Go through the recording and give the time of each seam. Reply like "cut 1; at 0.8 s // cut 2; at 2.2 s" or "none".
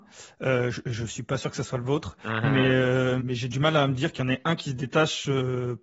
cut 1; at 3.2 s